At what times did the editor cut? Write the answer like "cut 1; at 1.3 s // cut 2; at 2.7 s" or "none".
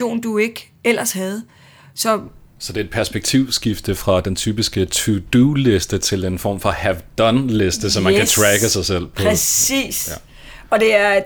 none

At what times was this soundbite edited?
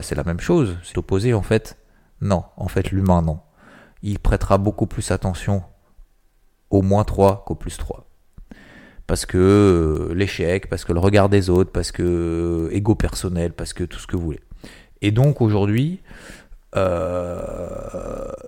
cut 1; at 0.9 s

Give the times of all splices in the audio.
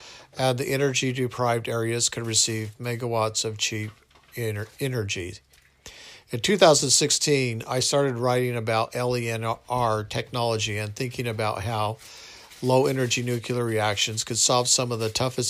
none

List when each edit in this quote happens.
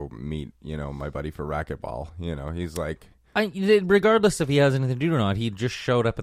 none

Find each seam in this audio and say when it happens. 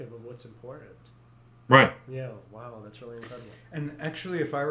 none

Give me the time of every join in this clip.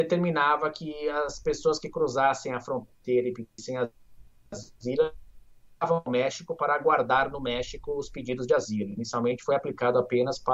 none

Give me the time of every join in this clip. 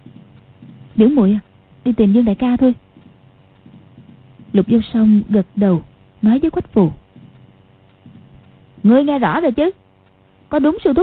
cut 1; at 1.7 s

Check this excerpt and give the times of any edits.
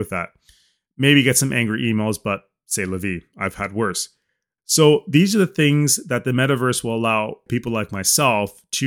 cut 1; at 4.6 s // cut 2; at 7.5 s

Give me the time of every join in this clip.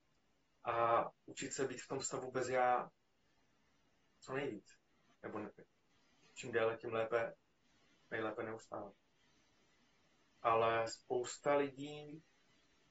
cut 1; at 5.1 s // cut 2; at 10.4 s

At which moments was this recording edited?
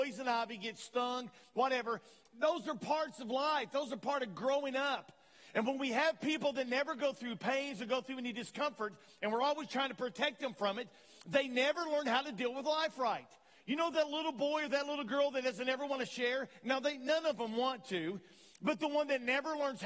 none

